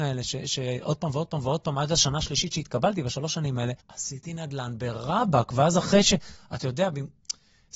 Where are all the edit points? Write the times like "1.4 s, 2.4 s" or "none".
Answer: 3.8 s